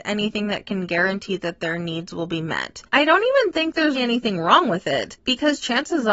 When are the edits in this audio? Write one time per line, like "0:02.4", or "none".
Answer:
0:02.9
0:03.9